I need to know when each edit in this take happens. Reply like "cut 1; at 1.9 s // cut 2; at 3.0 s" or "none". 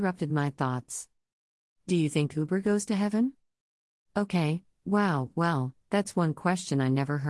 none

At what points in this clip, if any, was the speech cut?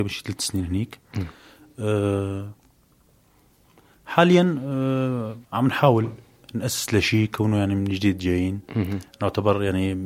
cut 1; at 5.4 s

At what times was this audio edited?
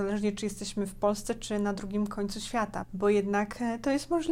cut 1; at 2.8 s

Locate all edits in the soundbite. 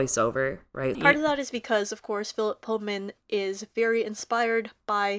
cut 1; at 0.9 s

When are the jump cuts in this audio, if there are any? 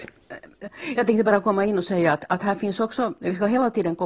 none

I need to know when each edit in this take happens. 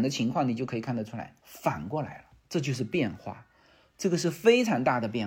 none

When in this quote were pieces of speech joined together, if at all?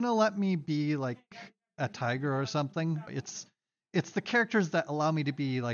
cut 1; at 3.1 s

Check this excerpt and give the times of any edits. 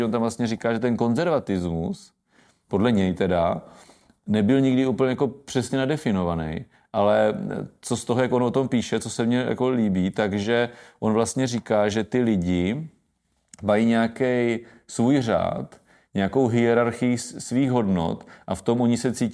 none

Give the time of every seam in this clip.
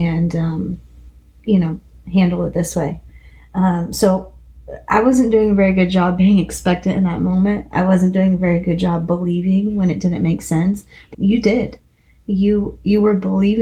cut 1; at 11.1 s

